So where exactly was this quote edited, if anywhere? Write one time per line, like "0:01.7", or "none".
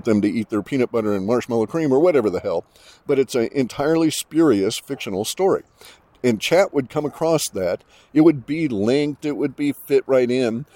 none